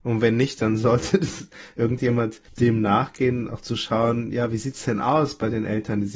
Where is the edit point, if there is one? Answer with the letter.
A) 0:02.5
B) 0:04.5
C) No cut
A